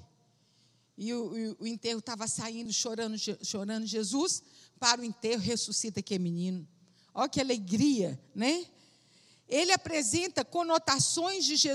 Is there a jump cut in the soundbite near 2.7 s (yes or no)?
yes